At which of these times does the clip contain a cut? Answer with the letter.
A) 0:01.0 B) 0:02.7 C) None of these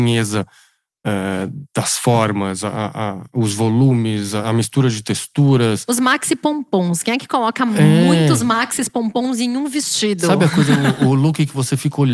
C